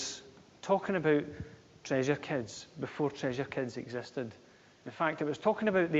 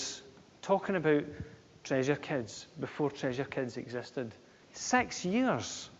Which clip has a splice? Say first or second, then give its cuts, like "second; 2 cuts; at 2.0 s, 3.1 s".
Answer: second; 1 cut; at 4.6 s